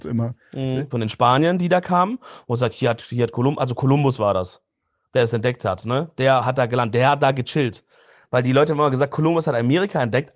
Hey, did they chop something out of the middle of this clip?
yes; 1 cut; at 0.9 s

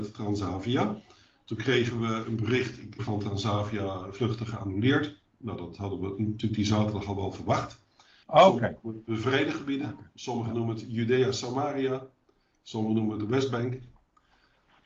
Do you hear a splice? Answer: yes; 2 cuts; at 3.0 s, 8.2 s

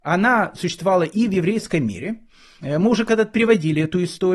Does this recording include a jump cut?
no; 0 cuts

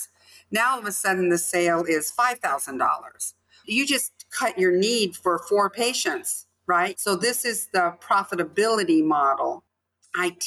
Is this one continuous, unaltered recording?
no; 1 cut; at 6.9 s

